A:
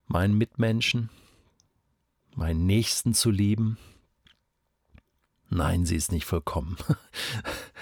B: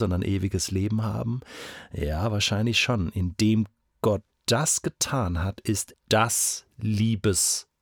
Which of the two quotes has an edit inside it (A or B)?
B